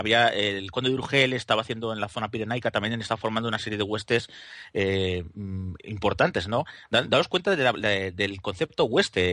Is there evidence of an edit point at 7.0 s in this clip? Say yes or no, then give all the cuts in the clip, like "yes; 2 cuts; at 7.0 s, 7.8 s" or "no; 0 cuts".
no; 0 cuts